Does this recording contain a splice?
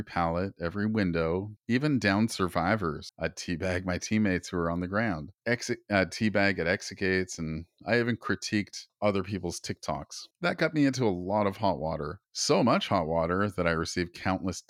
no; 0 cuts

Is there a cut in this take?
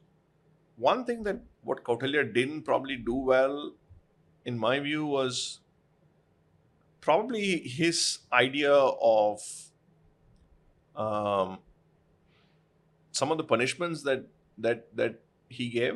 yes; 1 cut; at 1.5 s

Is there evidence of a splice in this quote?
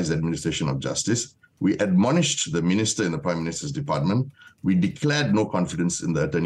no; 0 cuts

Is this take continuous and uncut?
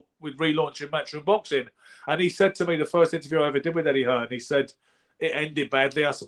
yes; 0 cuts

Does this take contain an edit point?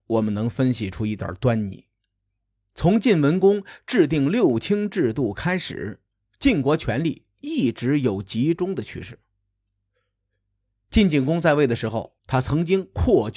yes; 1 cut; at 12.2 s

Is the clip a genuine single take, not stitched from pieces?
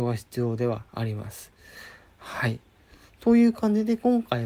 yes; 0 cuts

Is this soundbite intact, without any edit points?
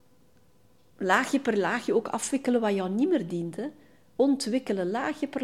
yes; 0 cuts

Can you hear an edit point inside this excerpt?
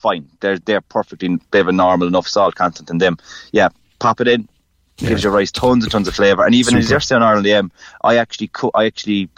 no; 0 cuts

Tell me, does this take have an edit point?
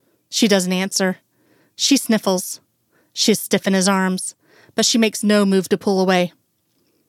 no; 0 cuts

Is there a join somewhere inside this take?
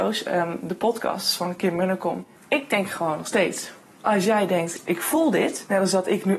yes; 1 cut; at 2.4 s

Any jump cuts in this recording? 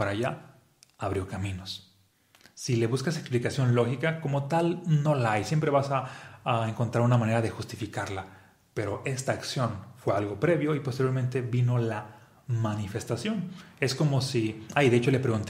no; 0 cuts

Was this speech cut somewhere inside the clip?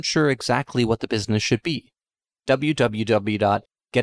yes; 1 cut; at 2.4 s

